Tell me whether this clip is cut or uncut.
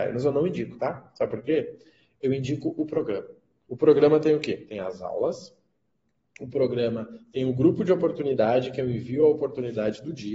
uncut